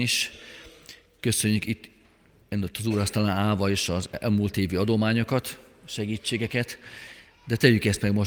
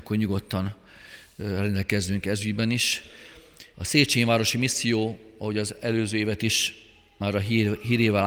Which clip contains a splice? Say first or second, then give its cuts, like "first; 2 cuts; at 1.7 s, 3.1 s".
second; 1 cut; at 3.7 s